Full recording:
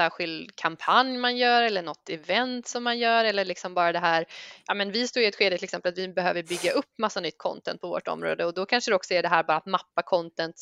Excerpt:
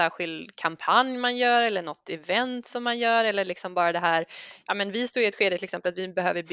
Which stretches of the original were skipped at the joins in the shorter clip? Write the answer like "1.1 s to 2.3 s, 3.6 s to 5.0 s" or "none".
none